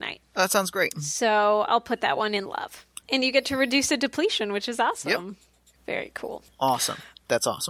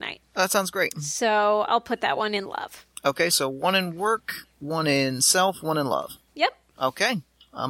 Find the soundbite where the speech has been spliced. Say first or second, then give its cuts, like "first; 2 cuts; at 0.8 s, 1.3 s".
first; 2 cuts; at 3.0 s, 5.7 s